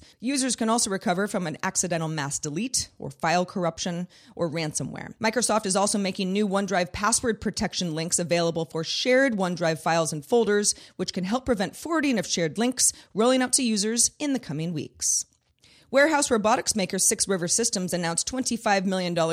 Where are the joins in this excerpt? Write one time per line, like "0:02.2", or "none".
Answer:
0:05.2